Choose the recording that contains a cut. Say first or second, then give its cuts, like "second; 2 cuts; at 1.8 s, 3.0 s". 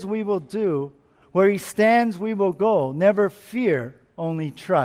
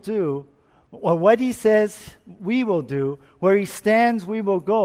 first; 1 cut; at 1.2 s